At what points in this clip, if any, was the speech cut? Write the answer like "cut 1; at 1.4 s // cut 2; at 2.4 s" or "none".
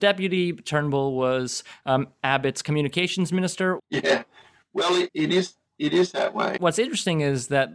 cut 1; at 3.8 s // cut 2; at 5.1 s // cut 3; at 6.6 s